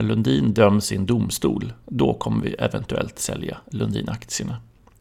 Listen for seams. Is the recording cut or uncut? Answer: uncut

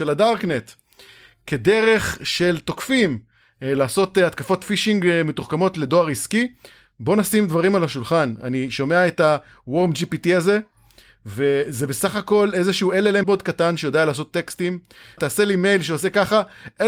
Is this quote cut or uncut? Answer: cut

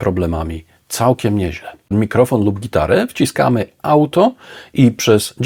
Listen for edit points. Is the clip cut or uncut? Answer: cut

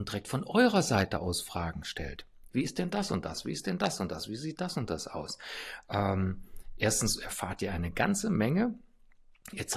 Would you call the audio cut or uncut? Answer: uncut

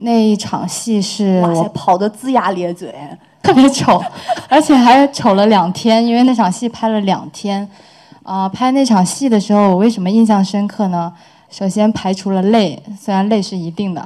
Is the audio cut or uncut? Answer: uncut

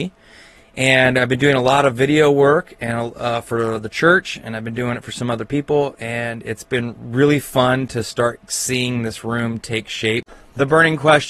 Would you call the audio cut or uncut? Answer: uncut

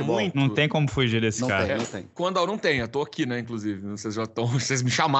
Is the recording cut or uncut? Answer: cut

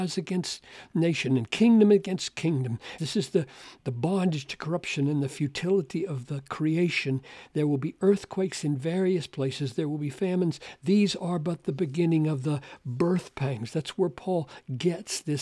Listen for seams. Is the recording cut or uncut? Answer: cut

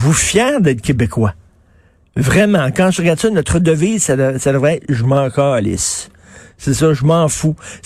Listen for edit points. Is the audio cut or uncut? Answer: uncut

